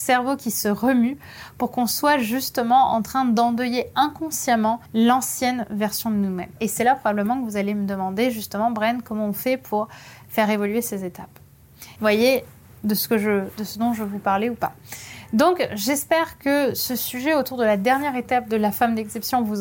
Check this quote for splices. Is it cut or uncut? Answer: cut